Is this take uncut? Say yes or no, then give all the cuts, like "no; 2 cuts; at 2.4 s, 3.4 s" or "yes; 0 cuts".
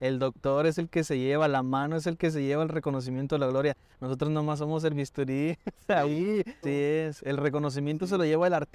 no; 1 cut; at 6.6 s